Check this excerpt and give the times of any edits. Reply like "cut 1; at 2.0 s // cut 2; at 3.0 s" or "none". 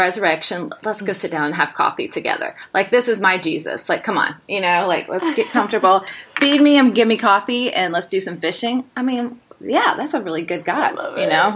none